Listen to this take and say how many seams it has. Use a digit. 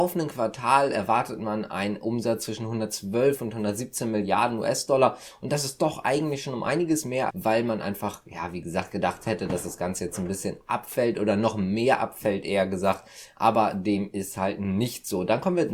1